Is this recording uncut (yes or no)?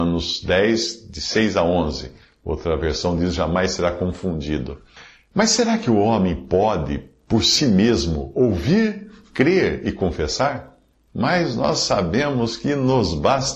no